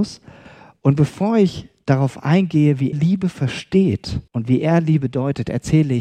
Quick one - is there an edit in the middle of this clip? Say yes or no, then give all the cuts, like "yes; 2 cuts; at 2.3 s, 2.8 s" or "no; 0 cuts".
yes; 2 cuts; at 2.9 s, 4.3 s